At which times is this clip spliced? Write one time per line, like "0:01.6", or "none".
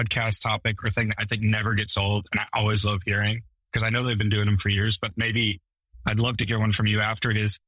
none